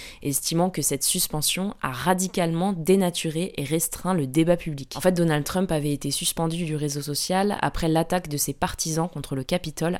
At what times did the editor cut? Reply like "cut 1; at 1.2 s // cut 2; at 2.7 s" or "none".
none

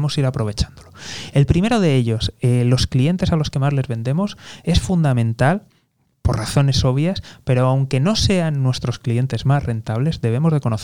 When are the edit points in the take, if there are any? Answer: none

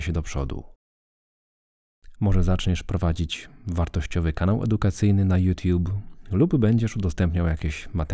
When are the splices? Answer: cut 1; at 2.1 s

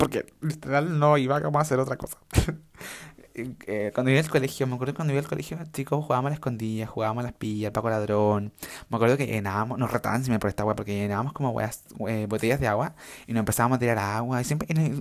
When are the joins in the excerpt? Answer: none

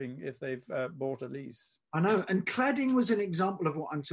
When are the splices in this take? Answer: none

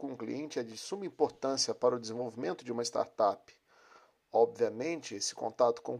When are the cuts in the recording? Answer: cut 1; at 4.2 s

